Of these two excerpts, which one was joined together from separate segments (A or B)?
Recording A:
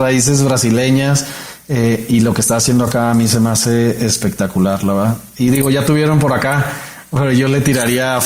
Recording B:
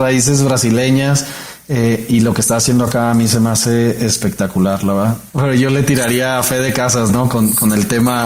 B